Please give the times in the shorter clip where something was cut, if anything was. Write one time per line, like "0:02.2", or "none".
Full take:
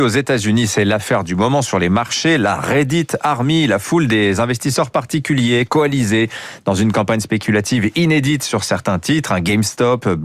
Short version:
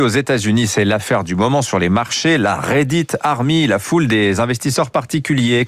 none